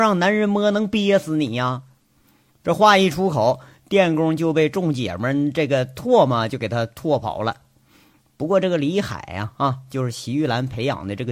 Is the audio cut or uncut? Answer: uncut